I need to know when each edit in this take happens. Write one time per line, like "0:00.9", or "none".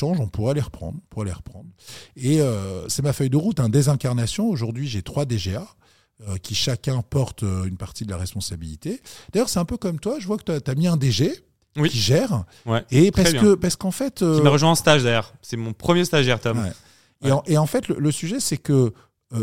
none